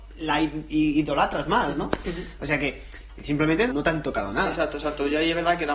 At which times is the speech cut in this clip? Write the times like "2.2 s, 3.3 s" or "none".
3.7 s